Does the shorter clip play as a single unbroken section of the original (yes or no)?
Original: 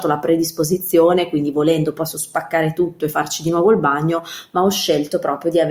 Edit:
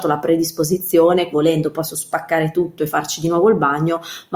no